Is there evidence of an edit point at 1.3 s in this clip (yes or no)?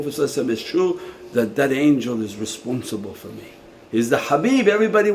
no